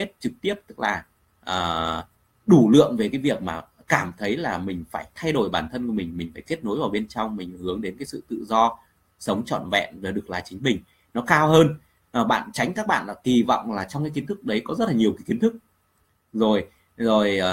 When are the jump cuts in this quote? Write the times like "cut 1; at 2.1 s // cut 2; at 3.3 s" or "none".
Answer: none